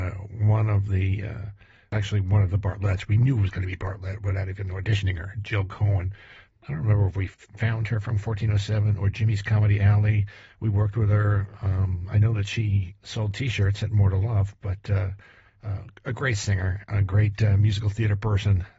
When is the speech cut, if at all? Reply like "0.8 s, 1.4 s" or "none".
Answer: none

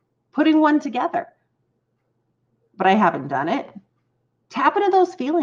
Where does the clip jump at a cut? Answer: 4.4 s

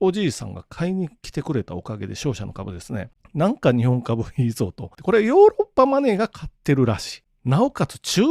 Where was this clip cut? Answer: 5.0 s

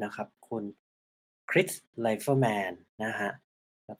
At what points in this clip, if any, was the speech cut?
none

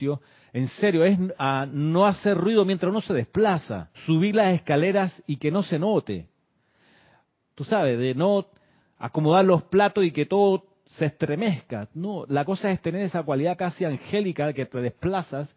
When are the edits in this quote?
1.3 s, 3.9 s, 7.4 s

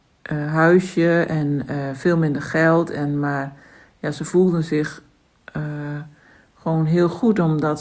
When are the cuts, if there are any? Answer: none

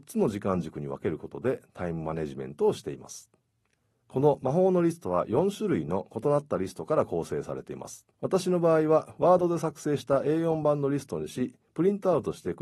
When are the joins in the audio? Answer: 3.9 s, 8.1 s

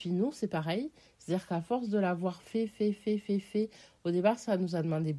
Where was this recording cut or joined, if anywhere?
none

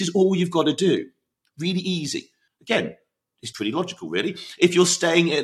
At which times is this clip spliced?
2.5 s, 3.5 s

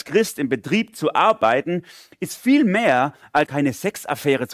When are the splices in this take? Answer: 3.5 s

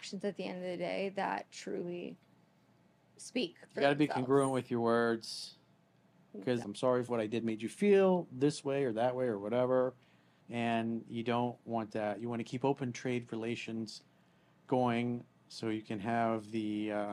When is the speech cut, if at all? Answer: 1.5 s, 6.6 s, 10.4 s

